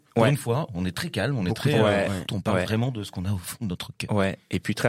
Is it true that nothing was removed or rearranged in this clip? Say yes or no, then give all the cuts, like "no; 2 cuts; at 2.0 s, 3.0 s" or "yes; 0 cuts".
no; 1 cut; at 2.3 s